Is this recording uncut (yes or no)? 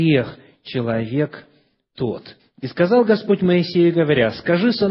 no